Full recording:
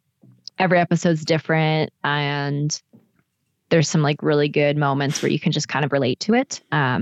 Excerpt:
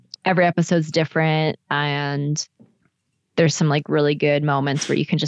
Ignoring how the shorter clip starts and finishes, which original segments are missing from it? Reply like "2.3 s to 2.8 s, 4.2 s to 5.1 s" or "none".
none